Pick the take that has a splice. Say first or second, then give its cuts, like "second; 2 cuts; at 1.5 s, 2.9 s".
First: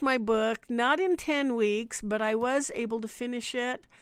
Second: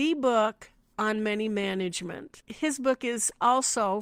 first; 1 cut; at 2.0 s